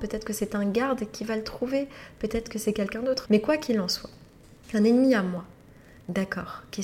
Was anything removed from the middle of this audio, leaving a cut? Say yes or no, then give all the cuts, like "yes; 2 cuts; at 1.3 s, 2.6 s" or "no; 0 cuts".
yes; 2 cuts; at 3.3 s, 4.6 s